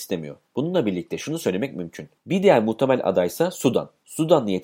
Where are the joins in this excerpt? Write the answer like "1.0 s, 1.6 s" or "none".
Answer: 2.2 s